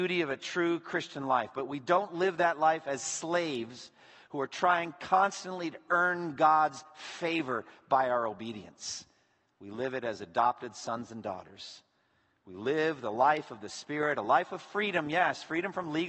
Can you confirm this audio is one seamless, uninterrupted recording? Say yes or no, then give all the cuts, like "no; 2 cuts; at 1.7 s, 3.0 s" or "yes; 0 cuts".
yes; 0 cuts